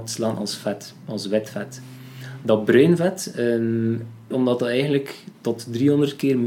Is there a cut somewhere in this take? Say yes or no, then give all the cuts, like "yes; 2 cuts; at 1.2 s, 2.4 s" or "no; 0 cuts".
yes; 1 cut; at 4.3 s